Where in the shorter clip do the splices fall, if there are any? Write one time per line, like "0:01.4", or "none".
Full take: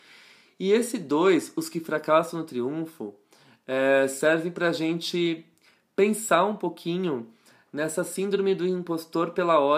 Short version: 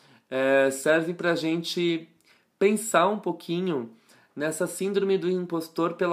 none